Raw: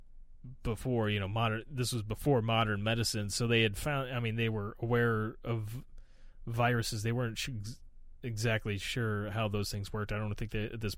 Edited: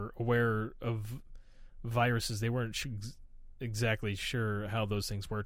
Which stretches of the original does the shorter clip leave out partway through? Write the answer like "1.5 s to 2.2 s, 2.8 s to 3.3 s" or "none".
none

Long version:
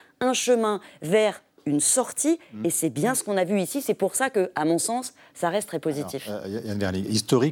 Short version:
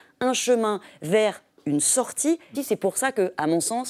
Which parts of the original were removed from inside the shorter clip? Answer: 2.5 s to 3.7 s

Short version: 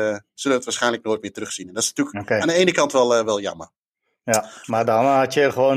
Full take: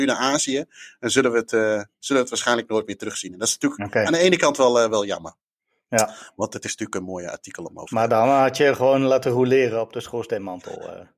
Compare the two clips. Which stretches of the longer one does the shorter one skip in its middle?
6.3 s to 7.9 s

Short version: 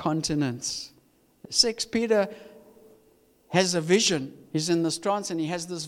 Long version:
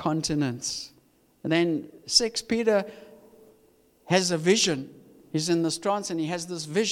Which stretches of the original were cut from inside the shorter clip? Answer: 1.4 s to 2.0 s, 5.0 s to 5.2 s

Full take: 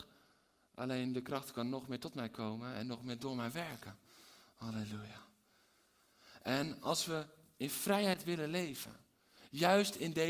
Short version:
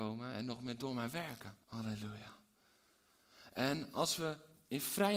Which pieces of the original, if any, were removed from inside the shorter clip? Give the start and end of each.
4.0 s to 4.5 s

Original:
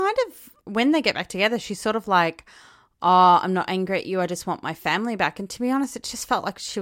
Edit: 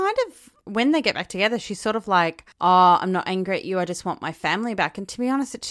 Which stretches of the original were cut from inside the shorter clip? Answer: 2.5 s to 2.9 s

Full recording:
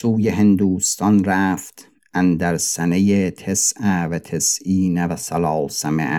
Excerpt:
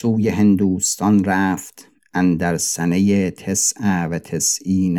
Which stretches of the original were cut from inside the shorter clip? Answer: none

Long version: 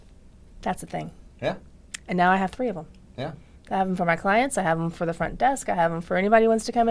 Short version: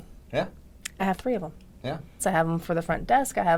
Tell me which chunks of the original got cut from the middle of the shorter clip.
2.1 s to 2.3 s, 3.5 s to 4.5 s

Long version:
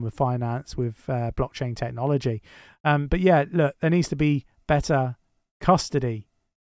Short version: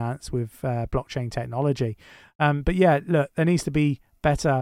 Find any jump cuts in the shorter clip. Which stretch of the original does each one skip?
none

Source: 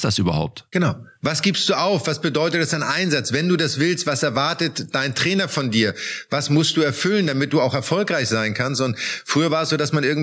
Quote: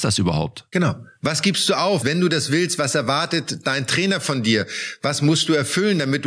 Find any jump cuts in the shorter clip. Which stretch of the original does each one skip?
2.0 s to 3.3 s

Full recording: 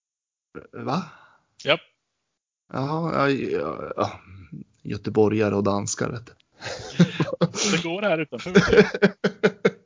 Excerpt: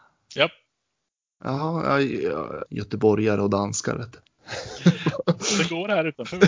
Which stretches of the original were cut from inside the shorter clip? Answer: 3.9 s to 4.8 s

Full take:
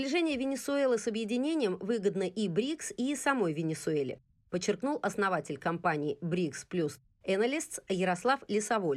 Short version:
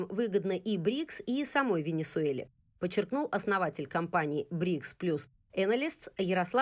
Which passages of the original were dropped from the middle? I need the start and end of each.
none

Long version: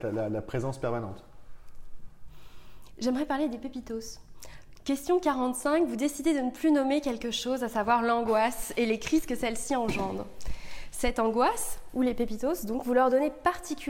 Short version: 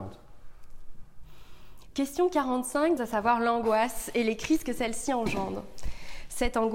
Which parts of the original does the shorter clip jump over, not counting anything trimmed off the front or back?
3.0 s to 4.8 s, 5.9 s to 7.6 s

